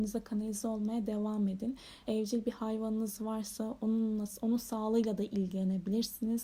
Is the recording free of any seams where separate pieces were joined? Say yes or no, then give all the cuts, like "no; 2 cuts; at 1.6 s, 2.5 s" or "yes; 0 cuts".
no; 1 cut; at 2.0 s